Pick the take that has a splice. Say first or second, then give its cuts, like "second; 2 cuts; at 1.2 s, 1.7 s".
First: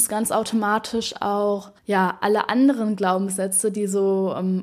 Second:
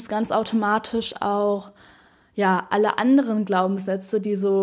first; 1 cut; at 1.8 s